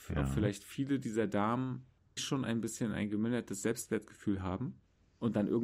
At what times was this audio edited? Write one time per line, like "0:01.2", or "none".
0:02.2